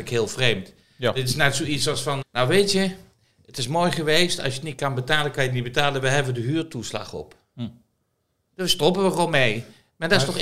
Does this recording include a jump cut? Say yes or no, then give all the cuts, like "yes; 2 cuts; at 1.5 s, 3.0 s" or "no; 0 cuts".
yes; 1 cut; at 2.2 s